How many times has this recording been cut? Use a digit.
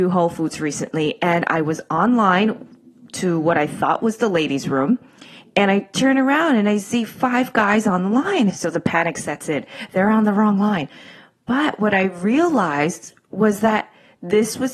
1